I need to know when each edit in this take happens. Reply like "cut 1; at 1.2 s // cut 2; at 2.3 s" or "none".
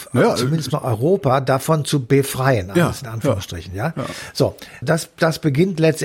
cut 1; at 4.8 s